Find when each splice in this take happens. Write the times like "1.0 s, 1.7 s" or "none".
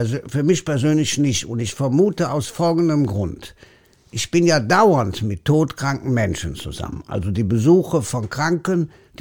none